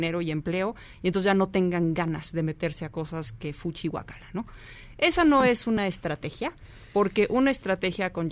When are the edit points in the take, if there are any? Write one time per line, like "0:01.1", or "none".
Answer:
none